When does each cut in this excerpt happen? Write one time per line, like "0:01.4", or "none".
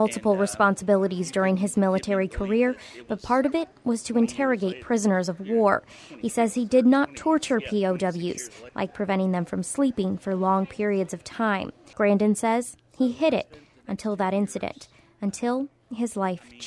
0:08.7
0:11.9